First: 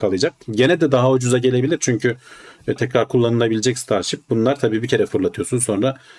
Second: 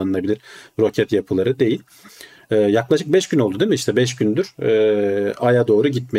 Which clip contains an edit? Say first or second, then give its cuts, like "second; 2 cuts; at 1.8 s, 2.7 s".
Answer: first; 1 cut; at 2.8 s